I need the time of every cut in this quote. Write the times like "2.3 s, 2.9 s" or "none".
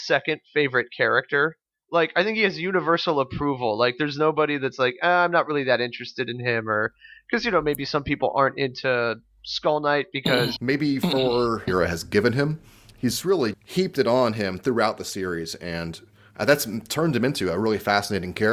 10.6 s, 11.7 s, 13.5 s